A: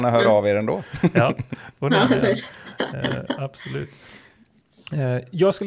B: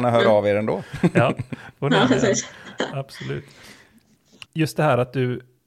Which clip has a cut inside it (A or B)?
B